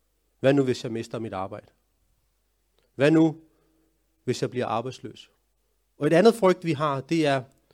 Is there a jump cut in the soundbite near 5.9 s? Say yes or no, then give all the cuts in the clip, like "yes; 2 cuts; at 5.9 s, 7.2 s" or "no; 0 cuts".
yes; 1 cut; at 5.9 s